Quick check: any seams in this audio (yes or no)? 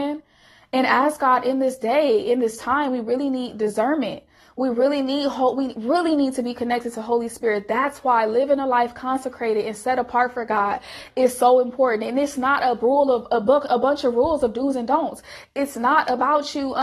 no